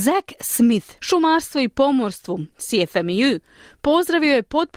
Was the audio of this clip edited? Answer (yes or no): yes